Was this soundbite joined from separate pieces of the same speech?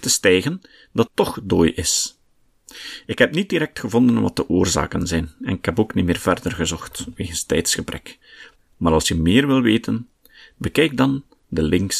yes; 2 cuts; at 1.1 s, 8.6 s

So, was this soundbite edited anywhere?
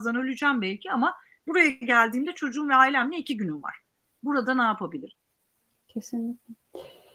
no; 0 cuts

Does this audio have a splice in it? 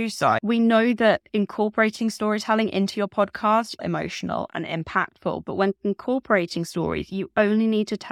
yes; 1 cut; at 3.8 s

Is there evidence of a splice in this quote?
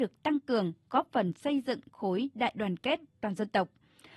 no; 0 cuts

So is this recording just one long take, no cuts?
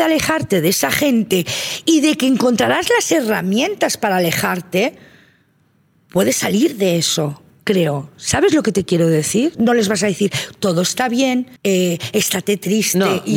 no; 2 cuts; at 9.5 s, 11.6 s

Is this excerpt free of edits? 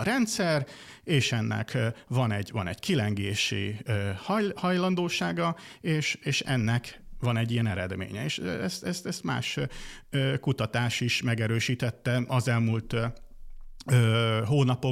yes; 0 cuts

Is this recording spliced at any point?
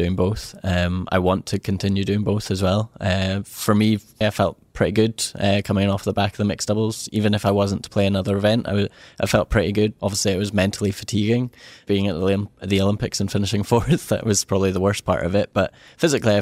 yes; 1 cut; at 4.2 s

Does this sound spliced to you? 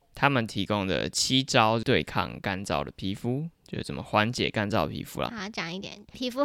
yes; 1 cut; at 5.3 s

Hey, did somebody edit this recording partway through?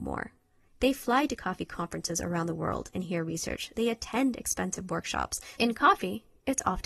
yes; 1 cut; at 5.6 s

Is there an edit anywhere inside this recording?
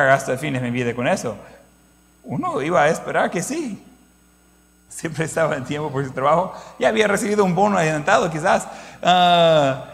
yes; 1 cut; at 4.9 s

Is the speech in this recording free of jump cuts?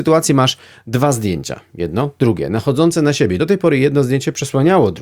yes; 0 cuts

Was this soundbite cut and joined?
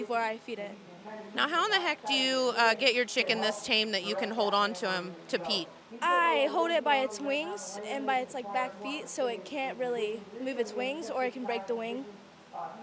no; 0 cuts

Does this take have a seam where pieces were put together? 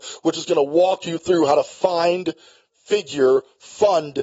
no; 0 cuts

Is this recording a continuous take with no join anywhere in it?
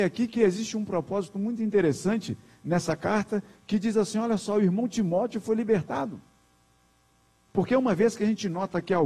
no; 1 cut; at 7.5 s

